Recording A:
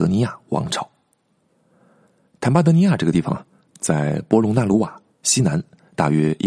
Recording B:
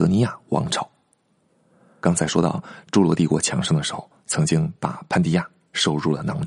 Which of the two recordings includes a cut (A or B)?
B